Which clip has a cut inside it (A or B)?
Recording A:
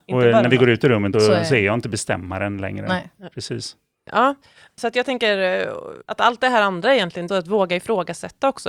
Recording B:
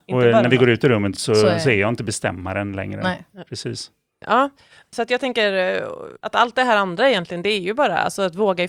A